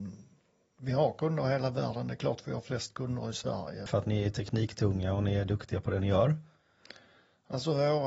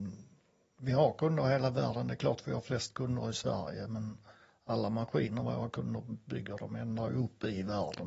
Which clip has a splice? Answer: first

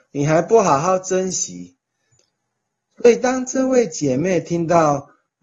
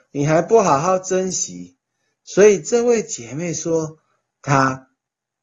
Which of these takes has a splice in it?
first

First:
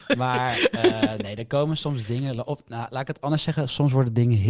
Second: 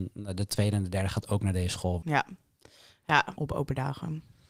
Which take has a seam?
second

